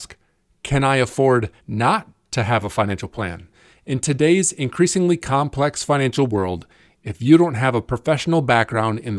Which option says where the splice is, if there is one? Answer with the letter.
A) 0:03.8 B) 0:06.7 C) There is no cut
C